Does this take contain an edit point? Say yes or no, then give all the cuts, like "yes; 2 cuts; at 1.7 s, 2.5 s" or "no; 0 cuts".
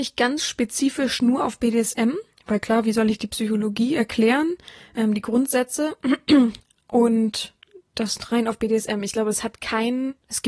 no; 0 cuts